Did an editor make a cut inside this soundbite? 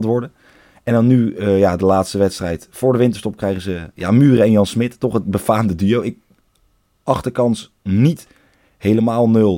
no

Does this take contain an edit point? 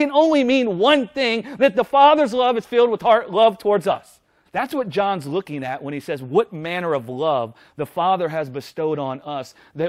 yes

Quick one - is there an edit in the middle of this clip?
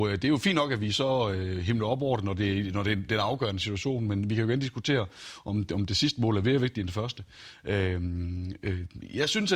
no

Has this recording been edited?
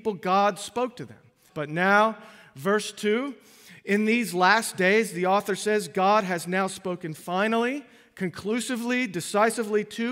yes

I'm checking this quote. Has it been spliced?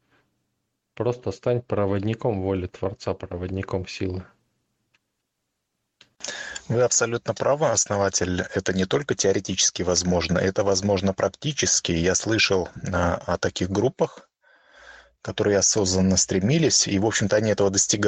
no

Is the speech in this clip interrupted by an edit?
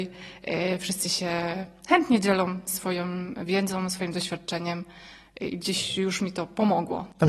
no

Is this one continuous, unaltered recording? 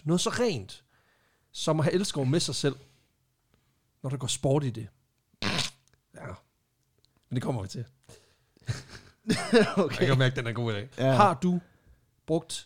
no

